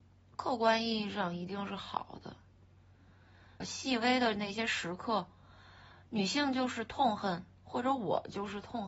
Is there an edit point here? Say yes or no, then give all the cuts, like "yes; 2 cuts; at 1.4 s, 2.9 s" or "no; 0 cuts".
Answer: yes; 1 cut; at 3.6 s